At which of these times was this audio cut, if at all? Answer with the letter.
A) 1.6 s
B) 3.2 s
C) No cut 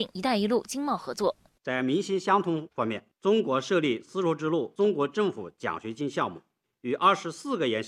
A